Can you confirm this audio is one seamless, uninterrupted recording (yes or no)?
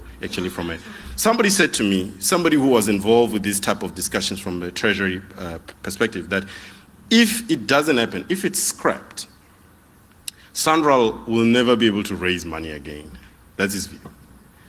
yes